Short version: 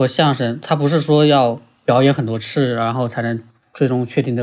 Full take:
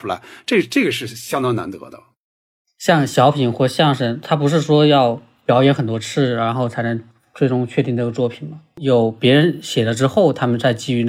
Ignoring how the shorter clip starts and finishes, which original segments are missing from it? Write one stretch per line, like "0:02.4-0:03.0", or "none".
none